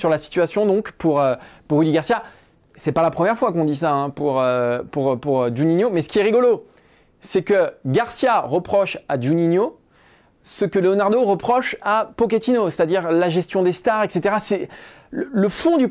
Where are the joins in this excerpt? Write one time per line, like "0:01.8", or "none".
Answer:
none